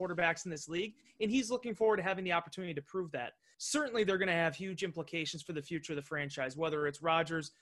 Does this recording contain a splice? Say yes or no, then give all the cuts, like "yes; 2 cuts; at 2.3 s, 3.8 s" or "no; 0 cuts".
yes; 1 cut; at 3.5 s